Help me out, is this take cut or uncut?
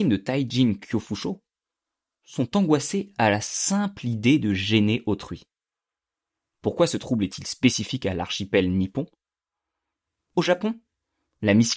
uncut